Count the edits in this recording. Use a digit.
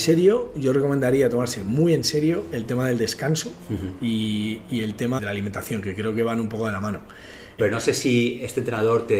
2